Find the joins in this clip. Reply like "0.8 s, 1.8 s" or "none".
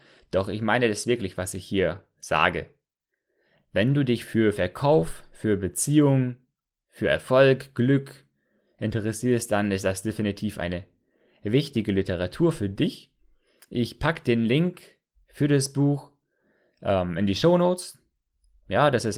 none